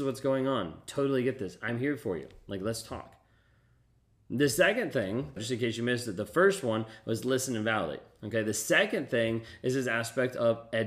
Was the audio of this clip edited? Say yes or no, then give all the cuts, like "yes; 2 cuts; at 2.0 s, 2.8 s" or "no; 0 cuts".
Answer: yes; 1 cut; at 5.4 s